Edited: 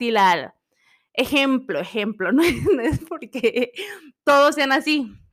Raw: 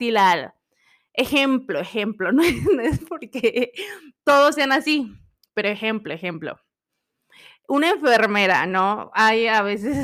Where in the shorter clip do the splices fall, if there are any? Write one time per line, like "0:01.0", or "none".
none